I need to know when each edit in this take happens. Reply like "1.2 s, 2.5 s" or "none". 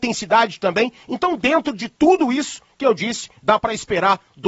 1.0 s